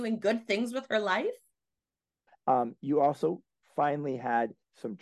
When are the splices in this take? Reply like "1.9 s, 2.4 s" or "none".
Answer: 2.3 s